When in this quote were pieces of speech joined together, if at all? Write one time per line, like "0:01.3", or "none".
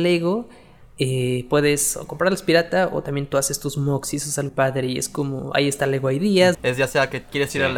0:04.5
0:06.5